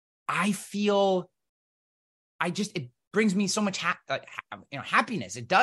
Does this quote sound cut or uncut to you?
uncut